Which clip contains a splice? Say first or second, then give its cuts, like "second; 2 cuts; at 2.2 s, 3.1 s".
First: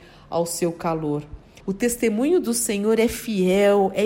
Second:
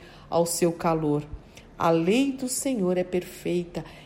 first; 1 cut; at 1.6 s